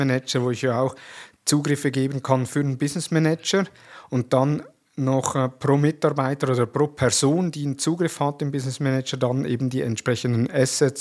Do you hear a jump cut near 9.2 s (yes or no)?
no